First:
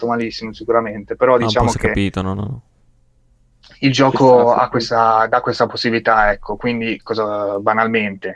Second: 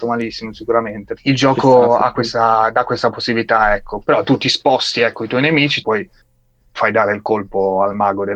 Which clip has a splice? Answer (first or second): second